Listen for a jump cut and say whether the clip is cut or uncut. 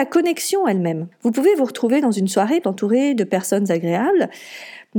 cut